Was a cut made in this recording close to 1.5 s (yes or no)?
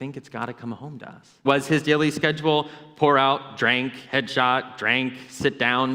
yes